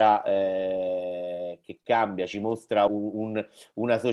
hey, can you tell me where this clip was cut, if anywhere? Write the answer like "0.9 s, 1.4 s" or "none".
2.9 s

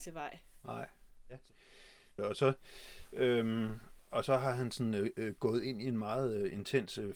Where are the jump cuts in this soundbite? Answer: 2.2 s

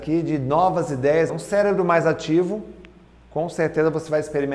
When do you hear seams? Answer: 1.3 s

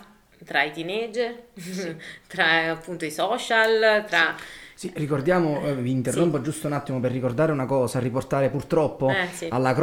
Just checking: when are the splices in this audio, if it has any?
none

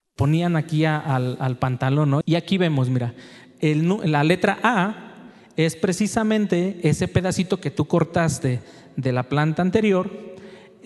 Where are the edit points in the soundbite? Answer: 2.2 s

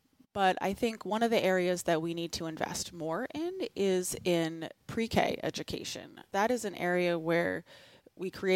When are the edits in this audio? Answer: none

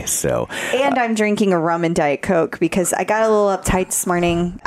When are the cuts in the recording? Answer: none

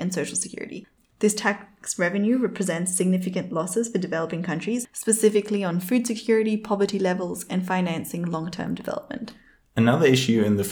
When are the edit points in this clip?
none

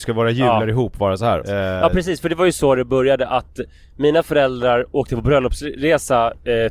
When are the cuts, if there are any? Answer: 1.4 s

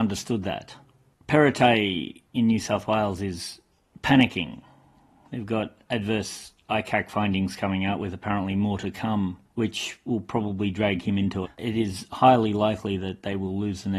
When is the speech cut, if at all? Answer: 9.5 s, 11.4 s

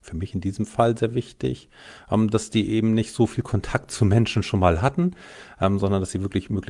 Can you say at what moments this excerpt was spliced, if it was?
none

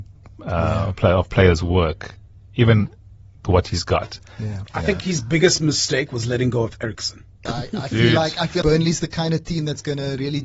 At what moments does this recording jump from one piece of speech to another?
4.7 s, 7.5 s, 8.6 s

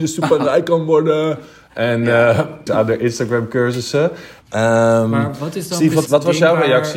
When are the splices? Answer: 2.7 s, 4.4 s, 6.1 s

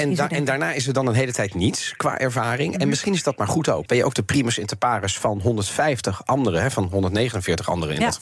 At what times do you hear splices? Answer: 3.9 s

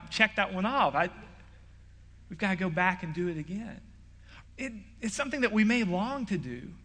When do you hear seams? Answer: 4.4 s

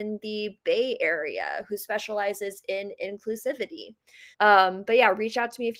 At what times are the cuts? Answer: 4.3 s

